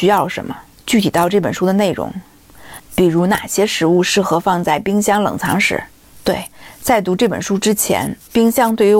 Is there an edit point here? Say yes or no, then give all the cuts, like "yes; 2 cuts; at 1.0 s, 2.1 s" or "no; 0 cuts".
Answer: yes; 1 cut; at 2.8 s